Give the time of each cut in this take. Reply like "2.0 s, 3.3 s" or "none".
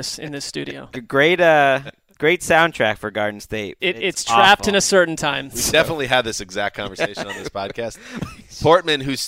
3.8 s, 8.2 s